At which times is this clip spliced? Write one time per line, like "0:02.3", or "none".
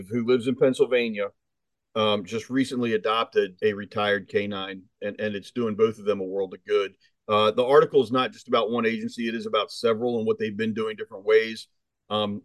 0:03.6